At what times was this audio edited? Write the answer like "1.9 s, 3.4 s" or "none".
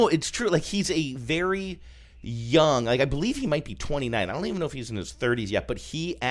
none